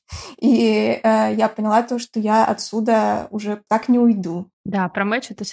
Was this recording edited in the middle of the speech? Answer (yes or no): yes